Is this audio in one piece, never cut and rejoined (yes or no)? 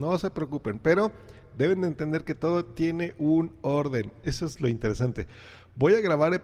no